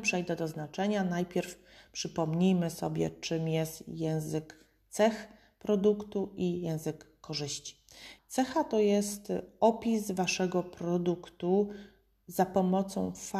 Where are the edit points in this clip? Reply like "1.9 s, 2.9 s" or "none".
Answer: 8.2 s